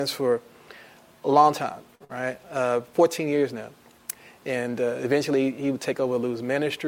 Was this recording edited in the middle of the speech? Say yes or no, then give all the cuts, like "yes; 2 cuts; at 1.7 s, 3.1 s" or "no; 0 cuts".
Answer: no; 0 cuts